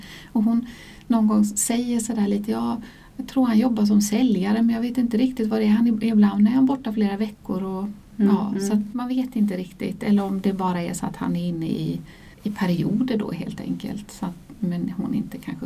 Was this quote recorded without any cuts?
no; 2 cuts; at 8.9 s, 12.3 s

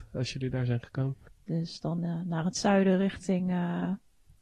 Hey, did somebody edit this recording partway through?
yes; 1 cut; at 1.3 s

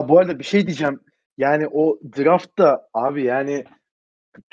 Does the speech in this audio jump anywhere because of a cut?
no; 0 cuts

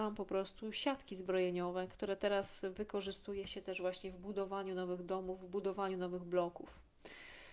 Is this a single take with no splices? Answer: yes; 0 cuts

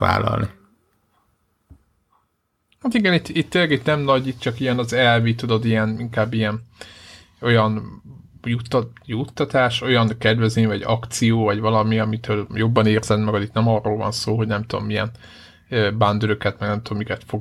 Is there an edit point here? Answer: no; 0 cuts

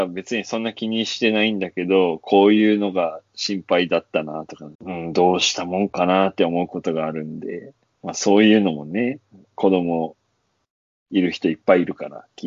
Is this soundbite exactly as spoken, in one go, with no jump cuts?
no; 1 cut; at 4.7 s

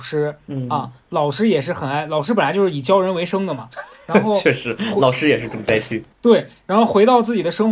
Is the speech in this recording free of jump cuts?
no; 1 cut; at 6.1 s

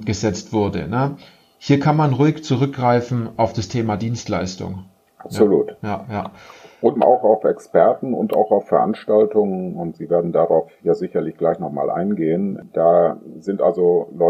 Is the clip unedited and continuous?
no; 1 cut; at 7.0 s

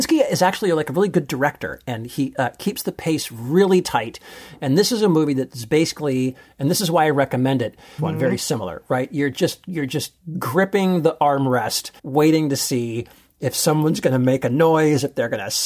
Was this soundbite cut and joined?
yes; 2 cuts; at 8.0 s, 12.0 s

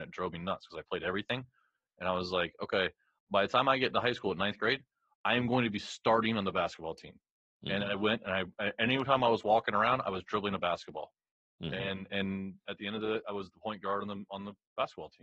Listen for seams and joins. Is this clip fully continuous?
yes; 0 cuts

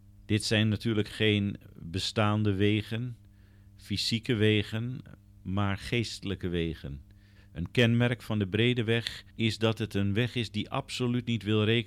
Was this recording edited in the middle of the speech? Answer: yes; 2 cuts; at 7.4 s, 9.3 s

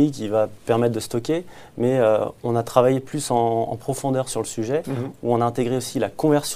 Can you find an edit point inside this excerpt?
yes; 1 cut; at 2.4 s

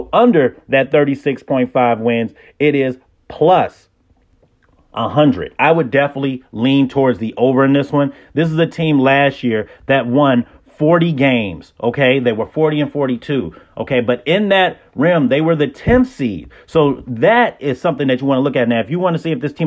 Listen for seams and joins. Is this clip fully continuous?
yes; 0 cuts

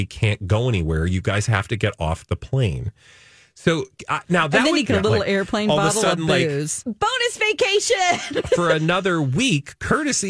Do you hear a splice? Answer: yes; 2 cuts; at 4.9 s, 6.8 s

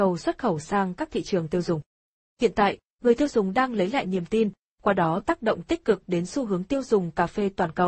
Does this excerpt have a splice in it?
yes; 1 cut; at 2.2 s

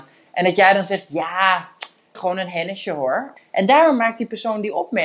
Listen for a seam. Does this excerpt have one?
yes; 2 cuts; at 2.1 s, 3.4 s

